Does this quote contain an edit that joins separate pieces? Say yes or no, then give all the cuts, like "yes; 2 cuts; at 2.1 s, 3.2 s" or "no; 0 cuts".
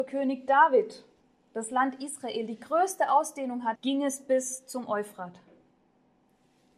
yes; 1 cut; at 3.8 s